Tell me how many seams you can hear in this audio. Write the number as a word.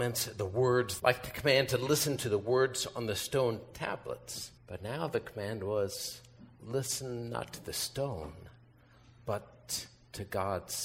two